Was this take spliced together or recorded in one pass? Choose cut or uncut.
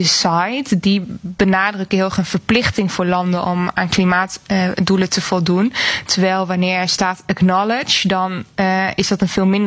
uncut